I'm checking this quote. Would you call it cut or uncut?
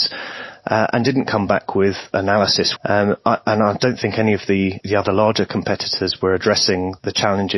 cut